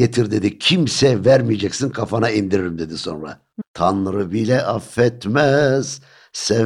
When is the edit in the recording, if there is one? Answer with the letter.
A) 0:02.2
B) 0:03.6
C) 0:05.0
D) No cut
B